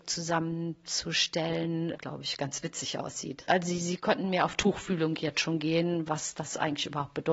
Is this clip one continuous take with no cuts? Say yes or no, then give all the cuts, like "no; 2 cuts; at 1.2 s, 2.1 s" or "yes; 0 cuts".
no; 2 cuts; at 2.0 s, 3.5 s